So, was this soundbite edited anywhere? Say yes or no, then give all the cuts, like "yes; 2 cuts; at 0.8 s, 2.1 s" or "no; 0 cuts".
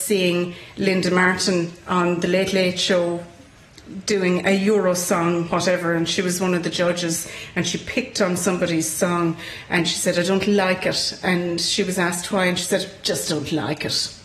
no; 0 cuts